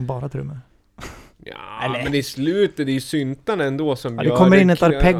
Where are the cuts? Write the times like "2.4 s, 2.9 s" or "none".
none